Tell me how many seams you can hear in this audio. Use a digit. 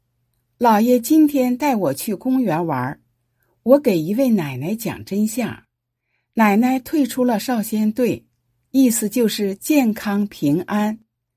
1